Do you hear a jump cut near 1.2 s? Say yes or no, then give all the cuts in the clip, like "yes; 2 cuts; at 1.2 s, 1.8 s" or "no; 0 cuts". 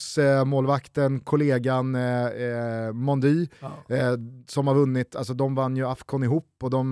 no; 0 cuts